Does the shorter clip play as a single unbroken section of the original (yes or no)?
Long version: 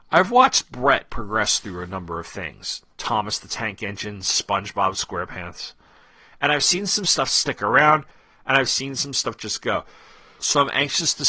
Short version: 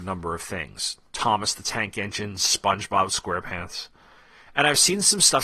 yes